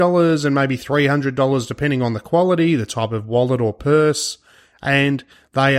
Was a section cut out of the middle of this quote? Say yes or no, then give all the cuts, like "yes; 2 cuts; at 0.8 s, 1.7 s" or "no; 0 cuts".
no; 0 cuts